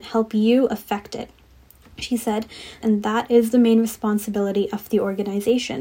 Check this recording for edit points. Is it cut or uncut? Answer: cut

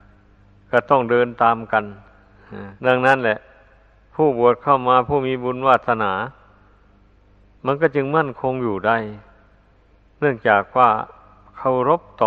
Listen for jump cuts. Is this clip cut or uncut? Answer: cut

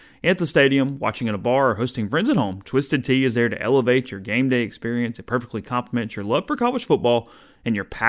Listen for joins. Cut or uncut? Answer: uncut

